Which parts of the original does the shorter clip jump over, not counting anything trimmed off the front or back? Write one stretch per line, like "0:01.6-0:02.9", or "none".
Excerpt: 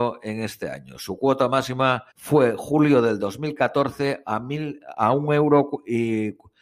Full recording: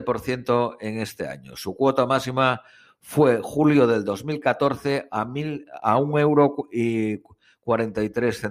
0:02.7-0:03.0